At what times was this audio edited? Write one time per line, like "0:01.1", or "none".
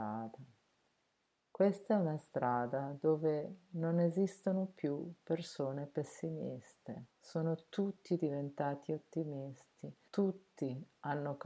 0:01.4
0:07.1
0:10.1